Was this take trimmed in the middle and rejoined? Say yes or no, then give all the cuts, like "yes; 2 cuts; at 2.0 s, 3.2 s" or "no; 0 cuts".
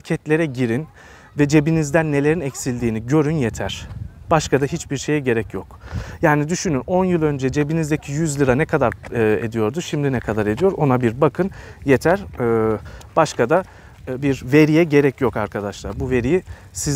no; 0 cuts